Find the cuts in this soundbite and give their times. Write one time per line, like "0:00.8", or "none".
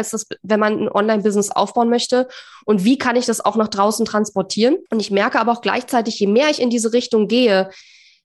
0:04.9